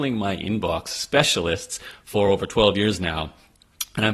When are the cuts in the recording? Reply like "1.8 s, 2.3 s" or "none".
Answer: none